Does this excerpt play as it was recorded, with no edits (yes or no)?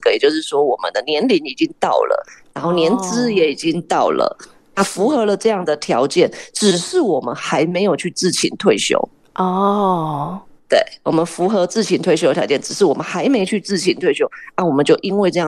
yes